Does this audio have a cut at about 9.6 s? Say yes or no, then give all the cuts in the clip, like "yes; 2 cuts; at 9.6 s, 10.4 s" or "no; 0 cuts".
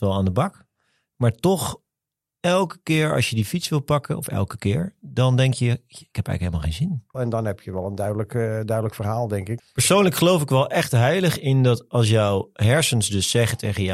yes; 2 cuts; at 7.1 s, 9.6 s